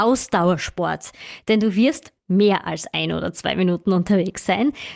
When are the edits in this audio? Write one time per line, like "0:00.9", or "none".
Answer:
0:02.2